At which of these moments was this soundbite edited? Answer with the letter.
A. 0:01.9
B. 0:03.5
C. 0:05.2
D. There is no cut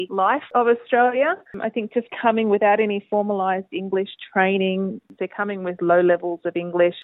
C